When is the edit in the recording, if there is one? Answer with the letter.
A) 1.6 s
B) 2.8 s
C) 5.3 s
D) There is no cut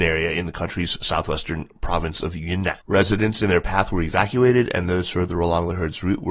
B